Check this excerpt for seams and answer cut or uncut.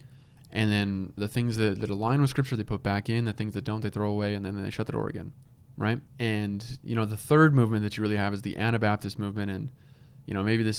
cut